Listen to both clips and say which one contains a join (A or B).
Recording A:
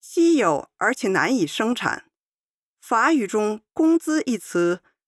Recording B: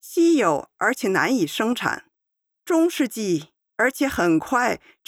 B